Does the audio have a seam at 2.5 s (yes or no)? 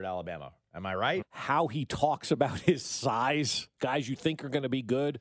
no